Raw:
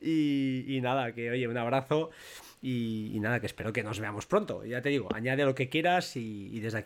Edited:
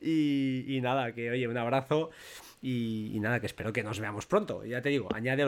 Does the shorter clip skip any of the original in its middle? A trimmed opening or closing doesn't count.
no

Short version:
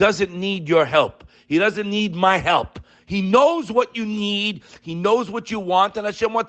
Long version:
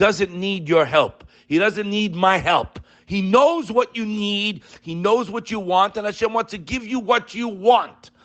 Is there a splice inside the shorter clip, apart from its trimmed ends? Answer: no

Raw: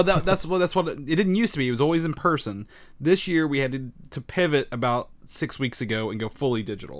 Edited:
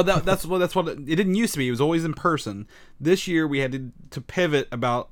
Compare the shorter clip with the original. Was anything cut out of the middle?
no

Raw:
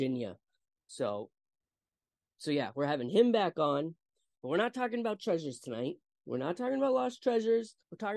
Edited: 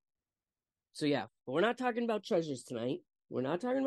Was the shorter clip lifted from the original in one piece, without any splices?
no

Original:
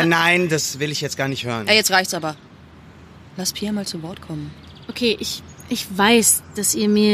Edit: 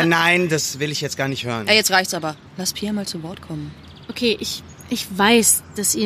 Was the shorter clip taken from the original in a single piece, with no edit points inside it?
no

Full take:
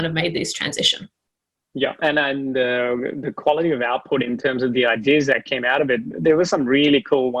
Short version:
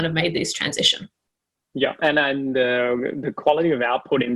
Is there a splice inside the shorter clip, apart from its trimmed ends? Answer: no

